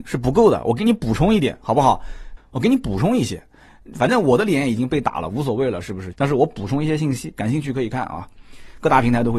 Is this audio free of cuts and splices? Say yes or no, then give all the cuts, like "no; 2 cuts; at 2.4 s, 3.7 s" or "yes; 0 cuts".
no; 2 cuts; at 2.4 s, 6.1 s